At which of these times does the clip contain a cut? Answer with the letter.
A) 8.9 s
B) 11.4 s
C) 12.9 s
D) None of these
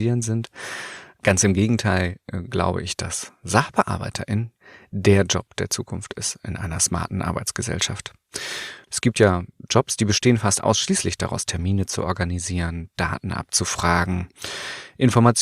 A